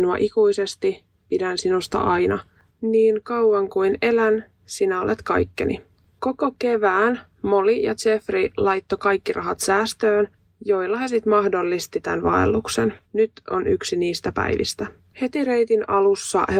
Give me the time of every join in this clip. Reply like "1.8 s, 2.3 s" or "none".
13.0 s, 15.1 s